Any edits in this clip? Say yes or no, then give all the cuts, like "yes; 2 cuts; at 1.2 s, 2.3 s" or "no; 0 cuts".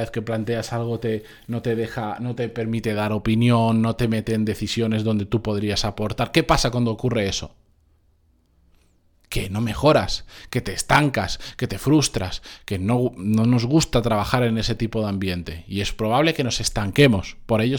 no; 0 cuts